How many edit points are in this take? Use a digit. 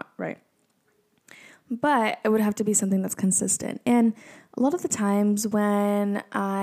0